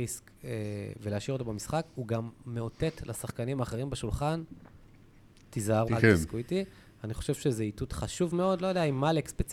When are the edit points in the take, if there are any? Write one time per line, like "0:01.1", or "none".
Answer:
0:05.9